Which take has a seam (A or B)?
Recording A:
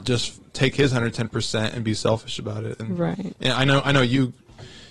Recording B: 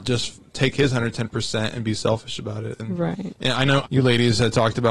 B